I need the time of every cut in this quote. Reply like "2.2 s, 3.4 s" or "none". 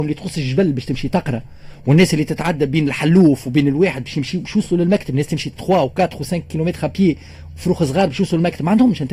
none